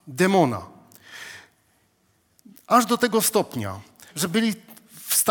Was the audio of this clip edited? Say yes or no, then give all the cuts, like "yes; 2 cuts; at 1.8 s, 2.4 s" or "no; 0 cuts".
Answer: yes; 1 cut; at 4.1 s